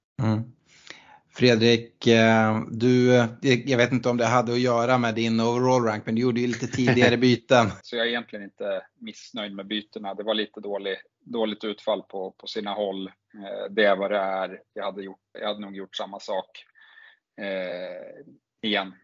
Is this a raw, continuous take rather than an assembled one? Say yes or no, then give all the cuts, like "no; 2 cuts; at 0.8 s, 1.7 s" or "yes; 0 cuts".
no; 2 cuts; at 7.8 s, 15.3 s